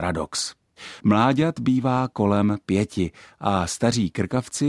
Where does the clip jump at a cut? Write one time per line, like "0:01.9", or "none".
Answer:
0:01.0